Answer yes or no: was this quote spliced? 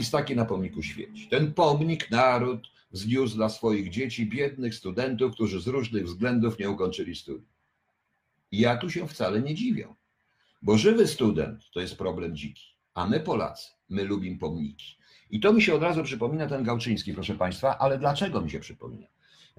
no